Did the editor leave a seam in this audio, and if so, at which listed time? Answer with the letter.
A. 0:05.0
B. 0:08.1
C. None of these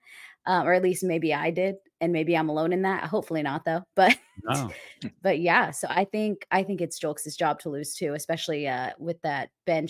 C